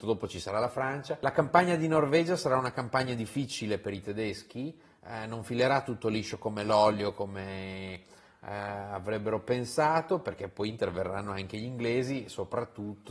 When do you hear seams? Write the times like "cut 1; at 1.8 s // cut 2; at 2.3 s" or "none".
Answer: none

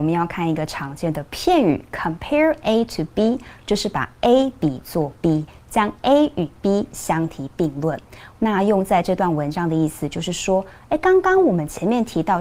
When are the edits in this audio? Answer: cut 1; at 8.4 s

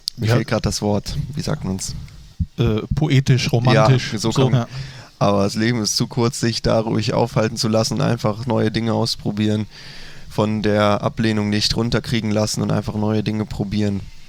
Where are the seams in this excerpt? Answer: cut 1; at 4.5 s

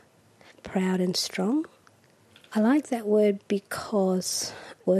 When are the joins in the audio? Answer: none

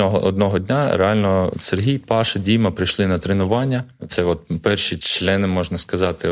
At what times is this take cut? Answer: none

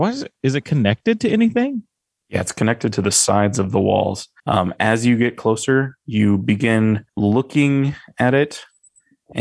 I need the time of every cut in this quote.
cut 1; at 4.4 s // cut 2; at 7.1 s

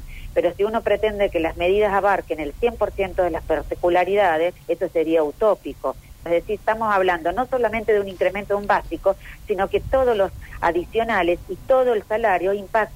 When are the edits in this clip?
cut 1; at 4.6 s // cut 2; at 6.3 s

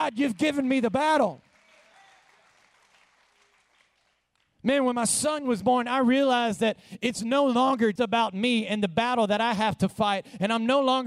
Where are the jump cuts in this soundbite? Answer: cut 1; at 8.0 s

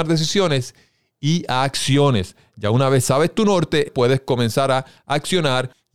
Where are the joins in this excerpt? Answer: cut 1; at 3.9 s

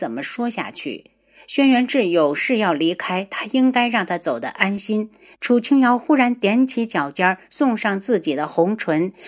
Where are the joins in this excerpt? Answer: cut 1; at 5.4 s

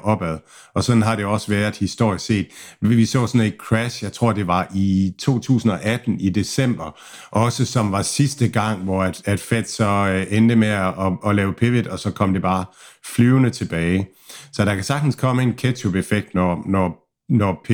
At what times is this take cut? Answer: none

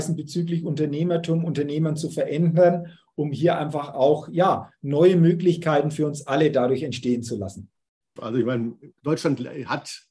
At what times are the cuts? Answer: cut 1; at 8.2 s

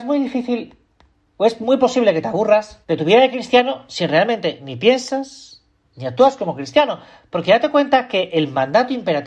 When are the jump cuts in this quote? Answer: cut 1; at 2.8 s // cut 2; at 5.9 s

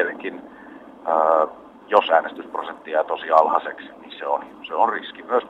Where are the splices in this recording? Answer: cut 1; at 3.9 s

